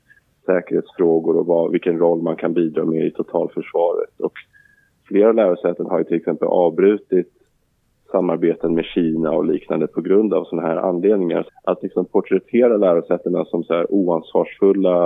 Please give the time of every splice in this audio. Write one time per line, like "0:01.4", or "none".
0:11.5